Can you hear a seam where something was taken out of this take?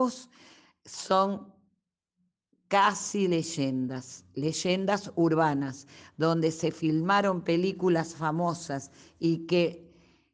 no; 0 cuts

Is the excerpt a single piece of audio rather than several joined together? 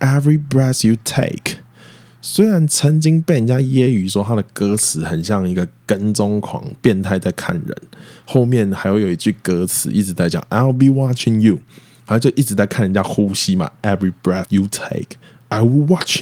yes; 0 cuts

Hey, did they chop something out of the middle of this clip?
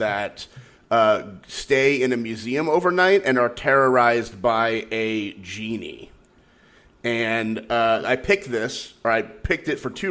no; 0 cuts

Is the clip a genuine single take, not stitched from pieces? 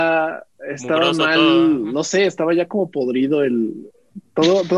yes; 0 cuts

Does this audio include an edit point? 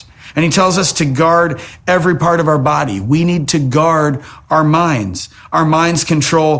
no; 0 cuts

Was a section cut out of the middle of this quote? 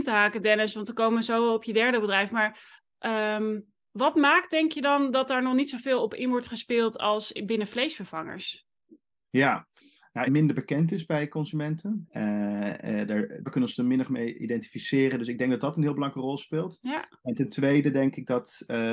yes; 3 cuts; at 10.3 s, 12.0 s, 13.5 s

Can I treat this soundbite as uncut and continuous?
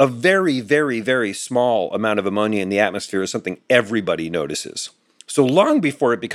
yes; 0 cuts

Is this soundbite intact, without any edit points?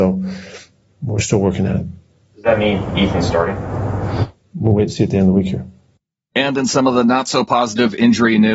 yes; 0 cuts

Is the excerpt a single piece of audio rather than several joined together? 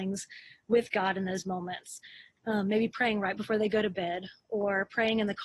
no; 1 cut; at 2.4 s

